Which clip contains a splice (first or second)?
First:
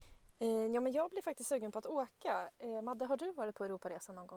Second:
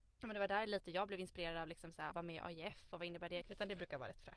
second